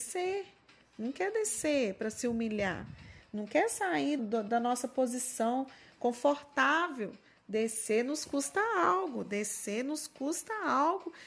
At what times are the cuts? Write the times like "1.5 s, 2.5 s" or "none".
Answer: 4.2 s